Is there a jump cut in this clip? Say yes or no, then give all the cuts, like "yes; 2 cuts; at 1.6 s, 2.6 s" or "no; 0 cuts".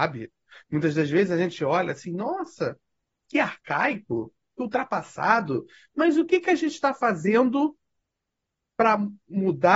no; 0 cuts